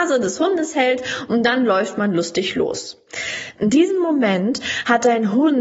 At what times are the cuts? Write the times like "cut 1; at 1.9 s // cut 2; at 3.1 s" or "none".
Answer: cut 1; at 3.5 s